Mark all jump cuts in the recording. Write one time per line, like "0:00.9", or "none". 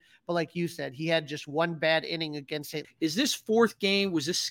0:02.8